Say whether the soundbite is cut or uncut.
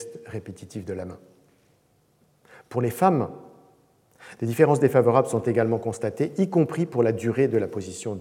uncut